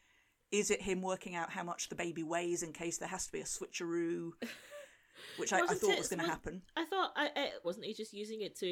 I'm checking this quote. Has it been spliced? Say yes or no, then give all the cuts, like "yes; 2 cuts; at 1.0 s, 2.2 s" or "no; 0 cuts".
yes; 1 cut; at 7.6 s